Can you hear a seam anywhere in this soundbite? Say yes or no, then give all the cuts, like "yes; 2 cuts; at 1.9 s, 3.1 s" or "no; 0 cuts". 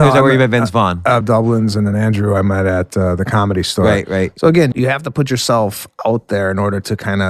yes; 2 cuts; at 1.2 s, 4.7 s